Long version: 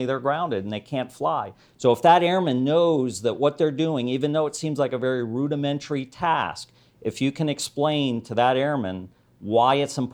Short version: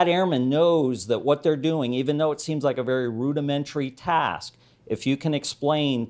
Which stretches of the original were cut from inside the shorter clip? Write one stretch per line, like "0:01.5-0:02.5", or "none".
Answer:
none